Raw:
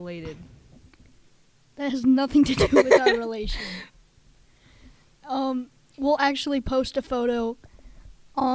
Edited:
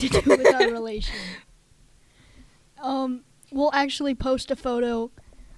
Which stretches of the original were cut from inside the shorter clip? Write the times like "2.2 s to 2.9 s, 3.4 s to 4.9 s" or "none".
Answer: none